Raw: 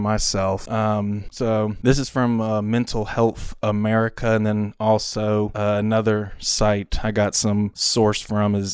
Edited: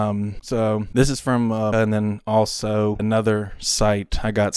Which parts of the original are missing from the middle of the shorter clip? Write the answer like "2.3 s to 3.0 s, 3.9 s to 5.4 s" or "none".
2.6 s to 4.3 s, 5.5 s to 5.8 s